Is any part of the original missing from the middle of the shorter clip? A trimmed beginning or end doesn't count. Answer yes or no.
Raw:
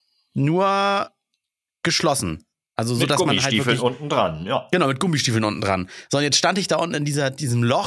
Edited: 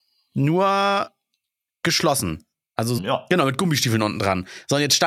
yes